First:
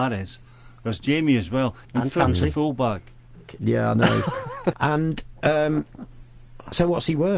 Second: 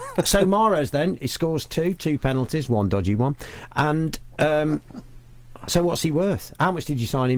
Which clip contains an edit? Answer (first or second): first